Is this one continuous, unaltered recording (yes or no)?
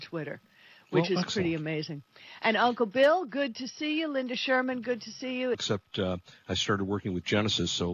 no